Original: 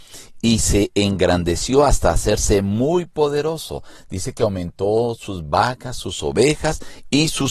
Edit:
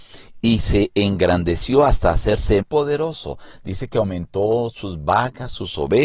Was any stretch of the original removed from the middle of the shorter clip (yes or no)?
yes